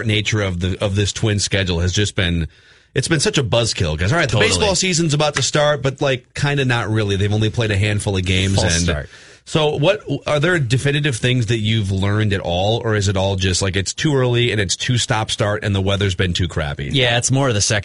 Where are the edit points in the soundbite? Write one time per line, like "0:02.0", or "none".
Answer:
none